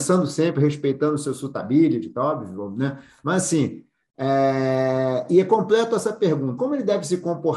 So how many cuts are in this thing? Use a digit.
1